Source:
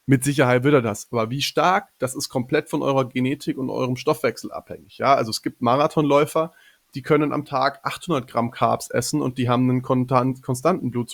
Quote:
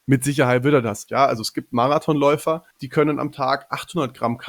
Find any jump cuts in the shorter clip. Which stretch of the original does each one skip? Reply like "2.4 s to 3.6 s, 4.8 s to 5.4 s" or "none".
1.1 s to 5.0 s, 6.6 s to 6.8 s